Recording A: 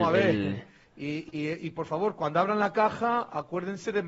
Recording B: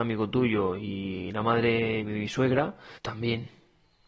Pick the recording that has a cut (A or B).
B